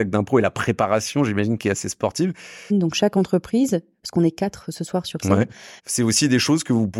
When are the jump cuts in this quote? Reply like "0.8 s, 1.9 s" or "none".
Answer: 2.7 s, 5.8 s

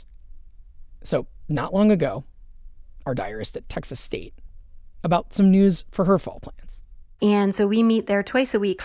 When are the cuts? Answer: 3.0 s, 7.2 s

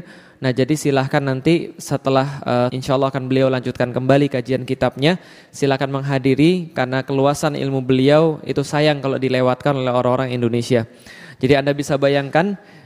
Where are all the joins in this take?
2.7 s

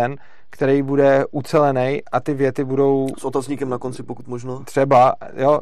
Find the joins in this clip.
none

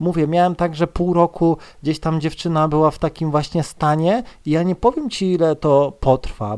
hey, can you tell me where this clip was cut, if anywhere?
4.4 s

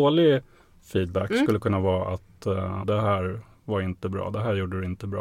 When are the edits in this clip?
2.8 s

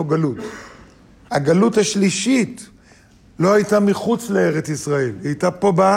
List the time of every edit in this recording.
1.3 s

